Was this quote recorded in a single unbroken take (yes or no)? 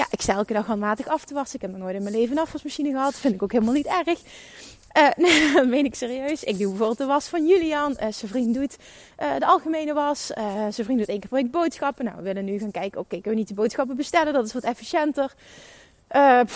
yes